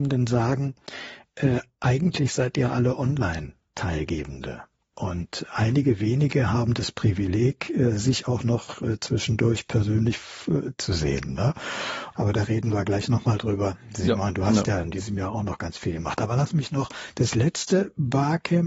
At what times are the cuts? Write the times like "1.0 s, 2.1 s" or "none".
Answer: 12.1 s